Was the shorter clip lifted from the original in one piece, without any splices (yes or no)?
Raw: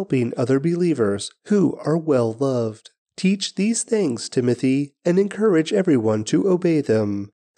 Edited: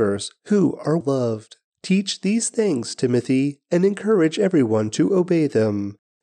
no